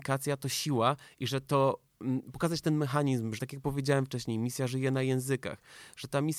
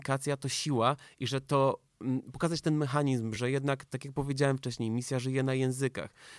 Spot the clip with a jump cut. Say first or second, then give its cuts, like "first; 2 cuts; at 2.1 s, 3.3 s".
first; 1 cut; at 3.4 s